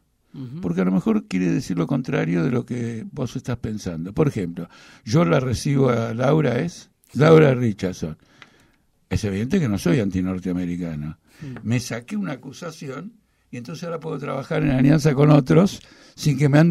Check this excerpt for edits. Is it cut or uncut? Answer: cut